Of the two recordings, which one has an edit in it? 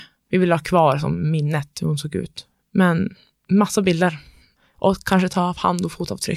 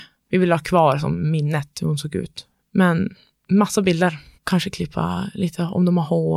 second; 1 cut; at 4.3 s

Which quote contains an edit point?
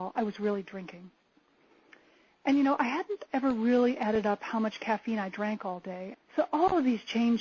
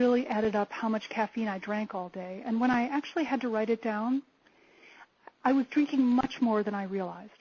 first; 1 cut; at 6.1 s

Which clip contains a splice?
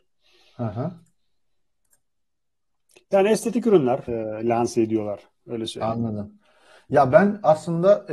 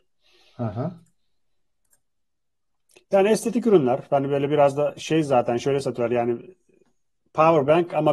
first; 1 cut; at 4.1 s

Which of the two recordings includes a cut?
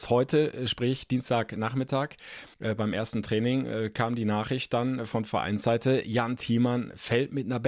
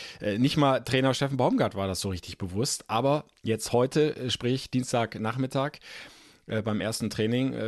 first; 1 cut; at 2.5 s

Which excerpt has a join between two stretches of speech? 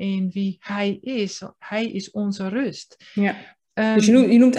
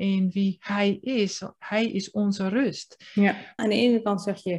second; 1 cut; at 3.6 s

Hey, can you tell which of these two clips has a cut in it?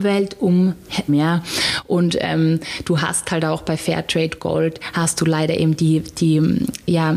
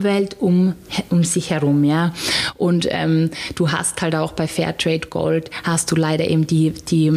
first; 1 cut; at 1.1 s

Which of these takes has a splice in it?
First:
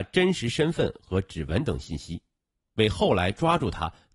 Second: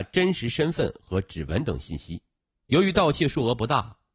second; 1 cut; at 2.6 s

